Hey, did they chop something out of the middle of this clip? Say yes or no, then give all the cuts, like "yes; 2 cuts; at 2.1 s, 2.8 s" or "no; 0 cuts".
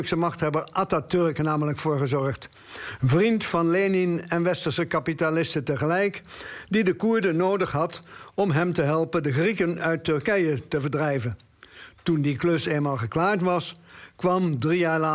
no; 0 cuts